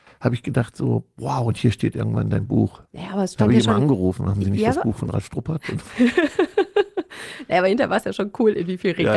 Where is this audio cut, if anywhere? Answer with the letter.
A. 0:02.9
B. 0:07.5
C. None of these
A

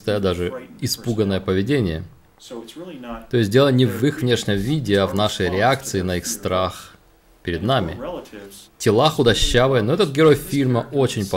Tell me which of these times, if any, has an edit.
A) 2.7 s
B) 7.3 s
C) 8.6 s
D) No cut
C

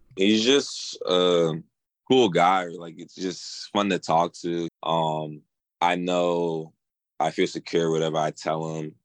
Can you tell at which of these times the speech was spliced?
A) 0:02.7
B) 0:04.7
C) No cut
B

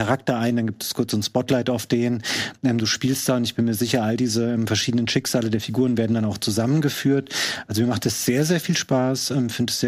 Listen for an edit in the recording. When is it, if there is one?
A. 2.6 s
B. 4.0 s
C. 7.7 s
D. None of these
D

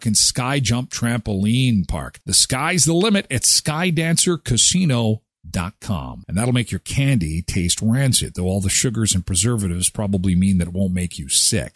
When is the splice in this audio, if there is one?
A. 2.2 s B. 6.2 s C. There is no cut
B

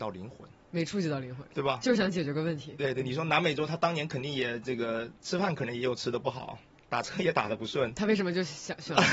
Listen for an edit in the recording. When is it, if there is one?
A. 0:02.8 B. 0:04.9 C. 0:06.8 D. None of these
A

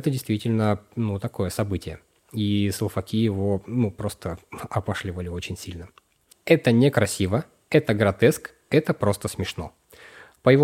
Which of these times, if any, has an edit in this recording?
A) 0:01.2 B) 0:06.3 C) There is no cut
B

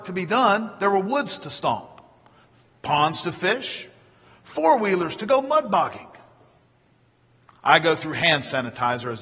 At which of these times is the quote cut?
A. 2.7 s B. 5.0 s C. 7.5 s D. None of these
C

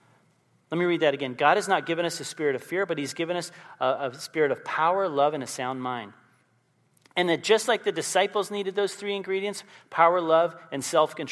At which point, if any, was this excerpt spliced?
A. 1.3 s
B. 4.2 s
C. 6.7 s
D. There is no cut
D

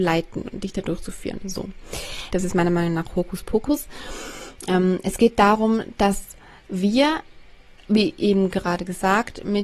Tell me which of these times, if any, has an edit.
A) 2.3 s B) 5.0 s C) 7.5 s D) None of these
A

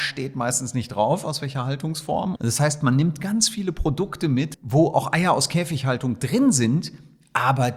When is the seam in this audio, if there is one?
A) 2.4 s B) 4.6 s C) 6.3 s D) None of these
A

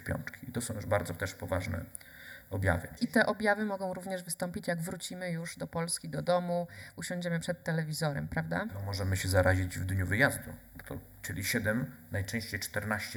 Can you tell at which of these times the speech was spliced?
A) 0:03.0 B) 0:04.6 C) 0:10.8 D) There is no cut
C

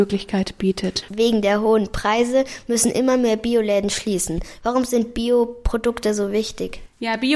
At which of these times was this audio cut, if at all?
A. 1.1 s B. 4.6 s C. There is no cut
A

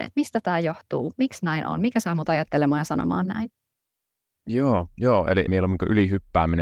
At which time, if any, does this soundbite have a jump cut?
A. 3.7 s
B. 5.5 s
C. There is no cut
B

